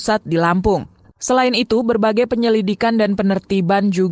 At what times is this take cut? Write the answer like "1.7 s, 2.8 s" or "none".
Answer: 1.1 s